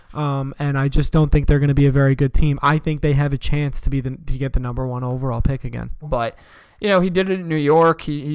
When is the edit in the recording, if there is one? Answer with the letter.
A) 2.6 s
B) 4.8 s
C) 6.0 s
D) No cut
C